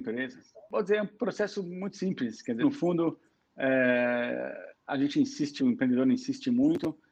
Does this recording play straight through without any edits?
no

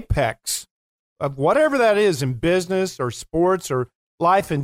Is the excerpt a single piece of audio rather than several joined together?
yes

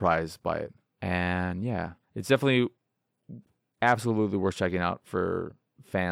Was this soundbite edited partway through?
yes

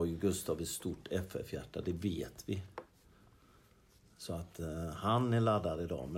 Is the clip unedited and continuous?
yes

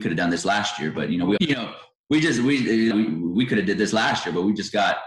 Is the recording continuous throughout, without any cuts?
no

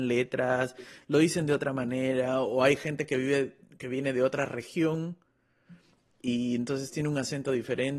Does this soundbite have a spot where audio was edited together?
no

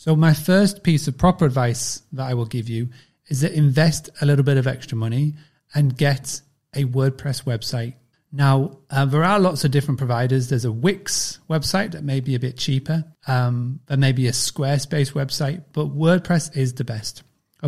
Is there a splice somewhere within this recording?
yes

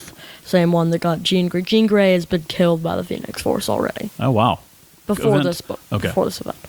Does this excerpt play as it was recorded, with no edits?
no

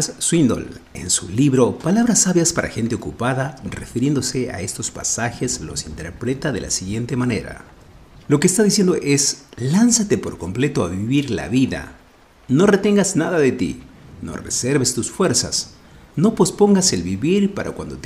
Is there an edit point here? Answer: no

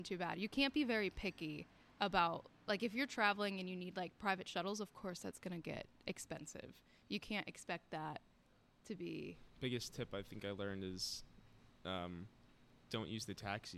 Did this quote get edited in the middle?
no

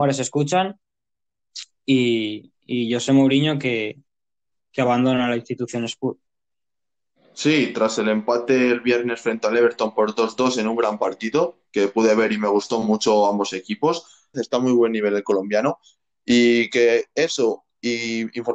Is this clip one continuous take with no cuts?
no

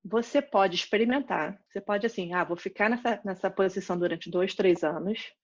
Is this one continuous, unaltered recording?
yes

